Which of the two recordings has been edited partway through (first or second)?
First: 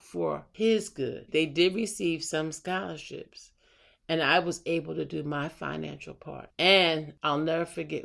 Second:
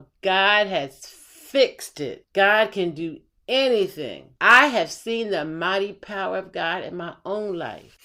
first